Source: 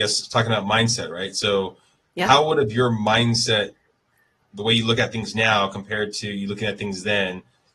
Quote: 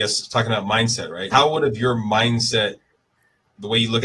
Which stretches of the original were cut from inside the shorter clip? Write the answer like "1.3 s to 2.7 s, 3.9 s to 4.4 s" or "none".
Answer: 1.3 s to 2.3 s